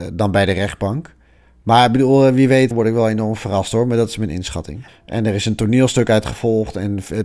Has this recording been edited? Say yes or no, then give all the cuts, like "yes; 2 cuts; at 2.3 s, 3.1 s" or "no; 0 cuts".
yes; 2 cuts; at 2.7 s, 4.9 s